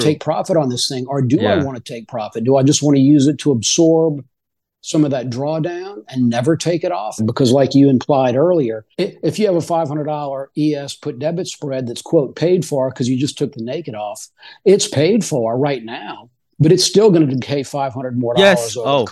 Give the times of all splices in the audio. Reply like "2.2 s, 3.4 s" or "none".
7.2 s, 8.9 s